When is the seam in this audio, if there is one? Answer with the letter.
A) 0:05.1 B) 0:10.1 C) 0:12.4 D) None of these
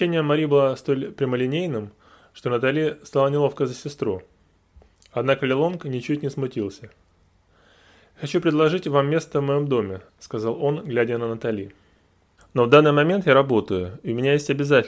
C